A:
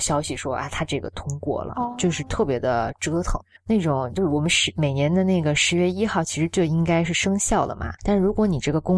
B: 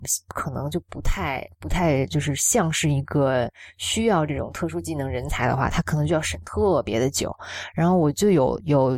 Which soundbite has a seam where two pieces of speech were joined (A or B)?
A